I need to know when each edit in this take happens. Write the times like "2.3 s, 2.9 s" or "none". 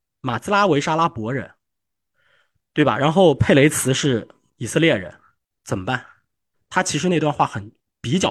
6.5 s